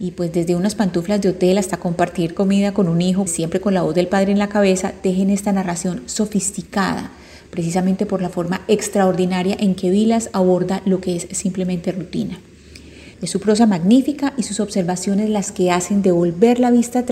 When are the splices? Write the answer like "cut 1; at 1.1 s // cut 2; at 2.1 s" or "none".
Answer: cut 1; at 3.3 s // cut 2; at 13.1 s